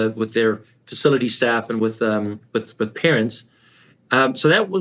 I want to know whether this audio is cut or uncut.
uncut